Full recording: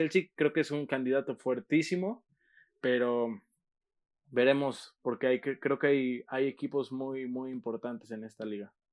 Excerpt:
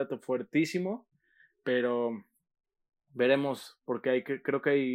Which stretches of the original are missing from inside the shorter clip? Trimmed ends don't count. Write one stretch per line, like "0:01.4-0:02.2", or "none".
none

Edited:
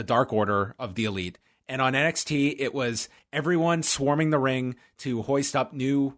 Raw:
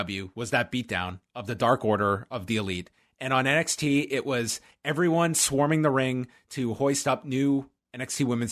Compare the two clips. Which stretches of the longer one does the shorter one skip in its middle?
none

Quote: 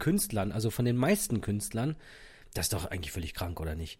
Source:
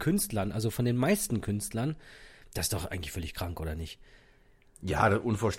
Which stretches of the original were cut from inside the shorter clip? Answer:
none

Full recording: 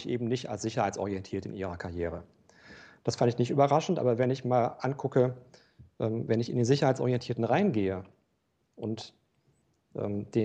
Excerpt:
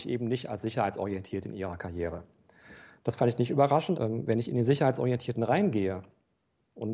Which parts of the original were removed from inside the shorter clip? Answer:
0:03.9-0:06.0

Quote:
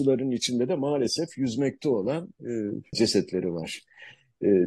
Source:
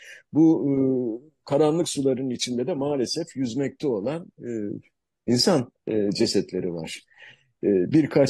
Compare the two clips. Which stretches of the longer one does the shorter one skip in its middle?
0:04.9-0:06.1

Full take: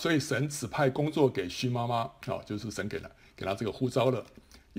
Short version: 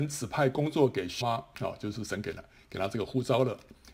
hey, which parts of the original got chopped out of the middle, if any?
0:01.6-0:01.9

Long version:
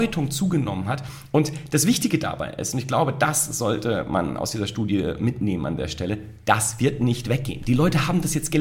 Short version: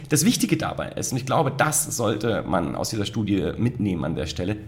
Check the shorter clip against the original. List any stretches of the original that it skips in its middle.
none

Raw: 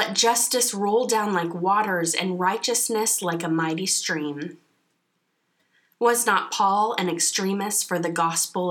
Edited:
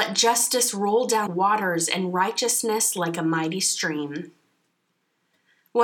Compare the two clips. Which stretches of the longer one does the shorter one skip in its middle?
0:01.3-0:01.5

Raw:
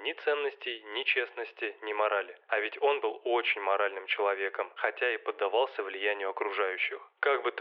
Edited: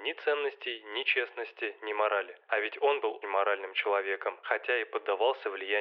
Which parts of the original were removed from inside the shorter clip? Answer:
0:03.2-0:03.5

